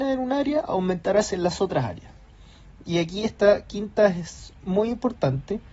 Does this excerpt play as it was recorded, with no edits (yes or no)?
yes